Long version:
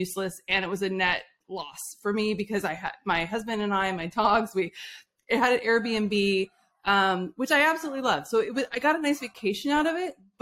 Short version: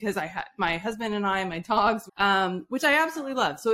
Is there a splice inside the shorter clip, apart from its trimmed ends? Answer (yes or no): yes